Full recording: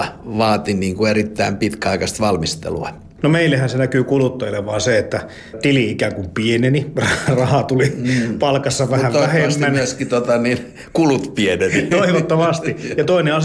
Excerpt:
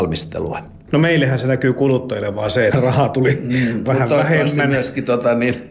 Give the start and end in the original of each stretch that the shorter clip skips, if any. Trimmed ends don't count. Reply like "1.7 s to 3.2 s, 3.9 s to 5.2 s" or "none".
5.0 s to 7.2 s, 8.4 s to 8.9 s